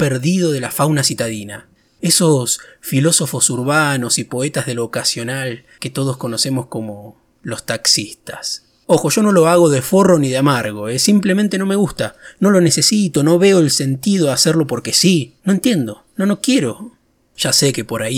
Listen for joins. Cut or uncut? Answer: uncut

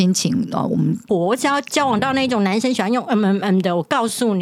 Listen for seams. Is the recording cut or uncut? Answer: cut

